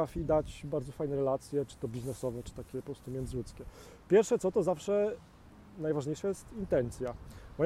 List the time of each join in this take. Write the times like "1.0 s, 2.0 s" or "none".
none